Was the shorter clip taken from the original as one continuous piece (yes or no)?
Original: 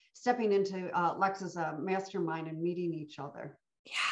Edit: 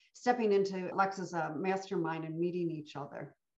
no